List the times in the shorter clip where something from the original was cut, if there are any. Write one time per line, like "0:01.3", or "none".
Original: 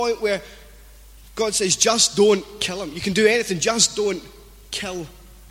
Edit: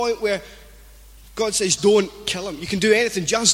0:01.8